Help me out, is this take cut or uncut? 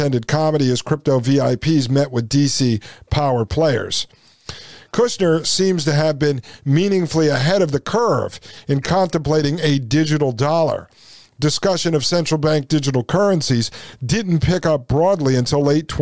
uncut